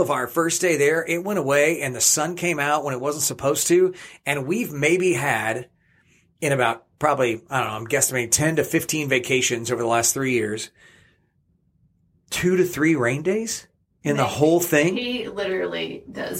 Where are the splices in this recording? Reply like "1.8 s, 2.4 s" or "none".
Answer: none